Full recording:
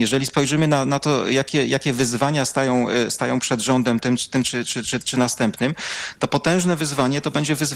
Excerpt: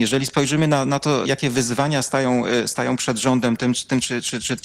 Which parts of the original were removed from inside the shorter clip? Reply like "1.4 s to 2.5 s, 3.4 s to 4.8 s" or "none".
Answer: 1.2 s to 1.7 s